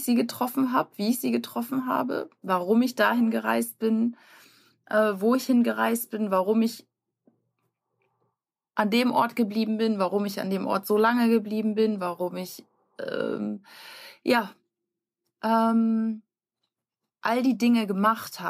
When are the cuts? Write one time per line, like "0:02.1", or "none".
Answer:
none